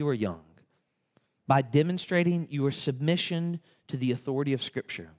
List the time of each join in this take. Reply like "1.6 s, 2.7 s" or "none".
none